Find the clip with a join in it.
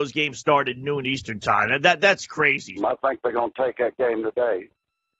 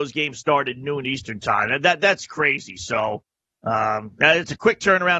first; 1 cut; at 2.8 s

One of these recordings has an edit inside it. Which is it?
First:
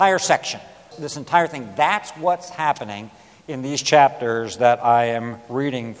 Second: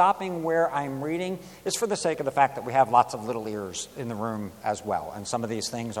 first; 1 cut; at 0.9 s

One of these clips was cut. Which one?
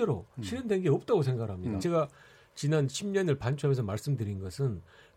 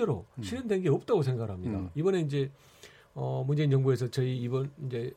first; 1 cut; at 1.8 s

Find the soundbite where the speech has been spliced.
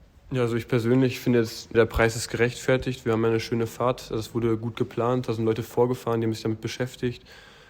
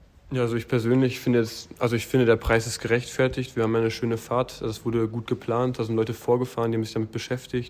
first; 1 cut; at 1.7 s

